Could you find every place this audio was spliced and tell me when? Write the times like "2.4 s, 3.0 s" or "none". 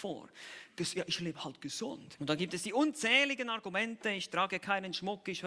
2.2 s

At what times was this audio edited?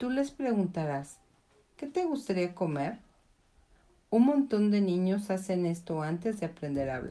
none

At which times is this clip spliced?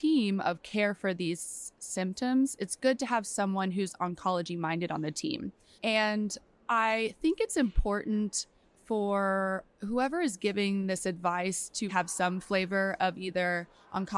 5.8 s, 11.9 s

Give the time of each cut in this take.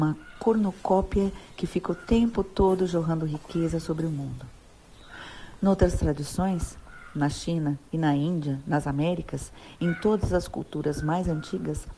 none

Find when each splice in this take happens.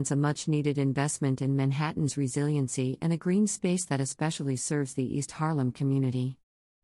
none

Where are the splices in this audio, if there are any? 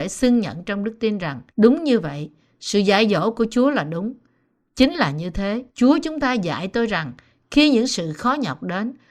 1.5 s, 5.7 s

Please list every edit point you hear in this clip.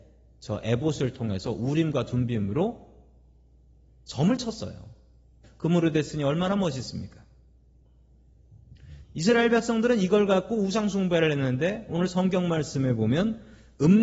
5.4 s, 9.0 s

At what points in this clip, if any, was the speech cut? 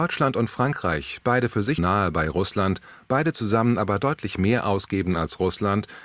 1.8 s

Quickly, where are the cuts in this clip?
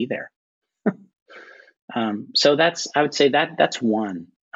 none

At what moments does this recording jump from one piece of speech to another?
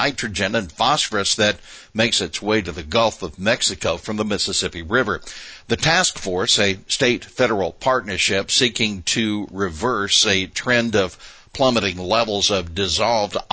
none

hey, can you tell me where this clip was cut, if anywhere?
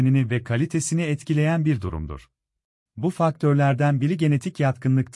2.9 s

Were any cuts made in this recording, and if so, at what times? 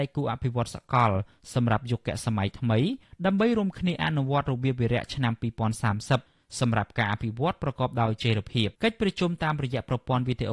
8.7 s

